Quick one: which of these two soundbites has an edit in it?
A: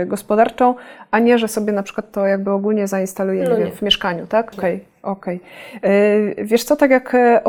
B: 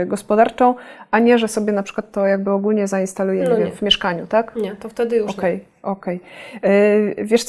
A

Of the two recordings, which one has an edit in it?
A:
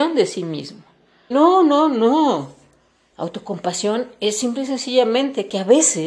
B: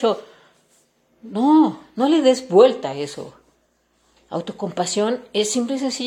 A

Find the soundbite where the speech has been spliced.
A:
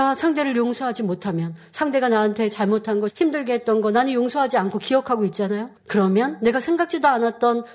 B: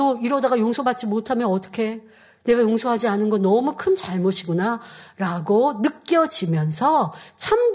A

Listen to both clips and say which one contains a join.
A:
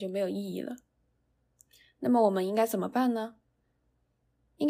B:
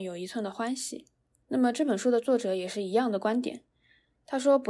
B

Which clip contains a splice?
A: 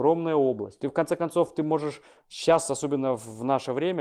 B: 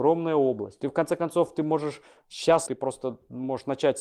B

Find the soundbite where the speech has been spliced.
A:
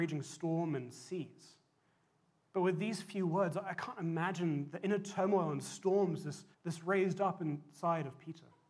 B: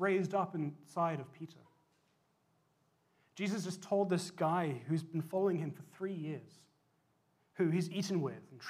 A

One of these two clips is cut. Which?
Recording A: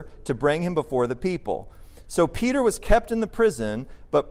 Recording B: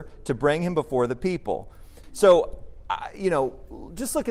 B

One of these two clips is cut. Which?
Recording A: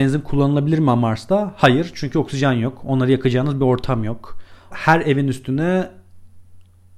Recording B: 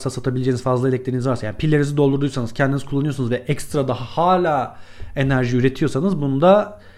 A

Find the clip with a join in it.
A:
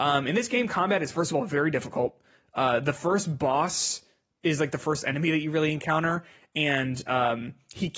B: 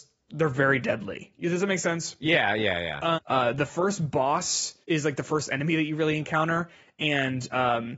B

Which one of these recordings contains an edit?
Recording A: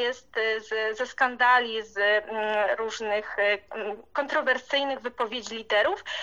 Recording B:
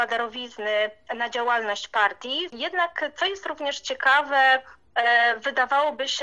B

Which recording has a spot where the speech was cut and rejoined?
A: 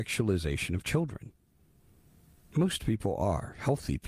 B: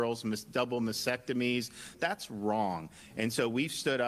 B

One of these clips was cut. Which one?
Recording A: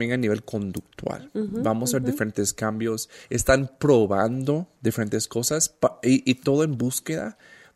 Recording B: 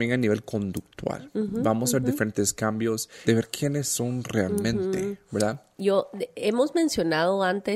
B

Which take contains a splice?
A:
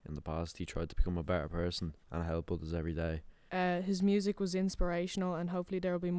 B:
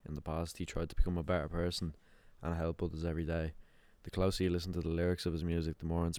A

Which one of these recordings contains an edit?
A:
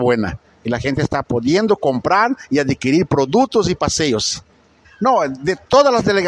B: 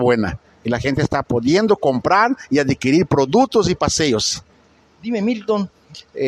A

